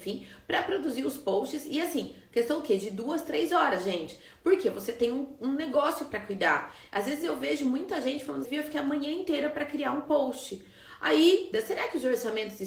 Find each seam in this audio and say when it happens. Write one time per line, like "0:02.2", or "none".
0:08.4
0:11.5